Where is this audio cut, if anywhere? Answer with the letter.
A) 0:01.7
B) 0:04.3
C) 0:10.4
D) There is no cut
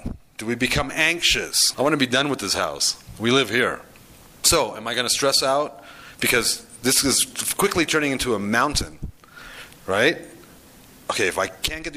A